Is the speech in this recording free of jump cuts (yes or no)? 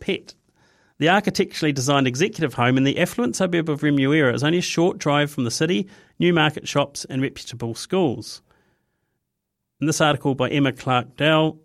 yes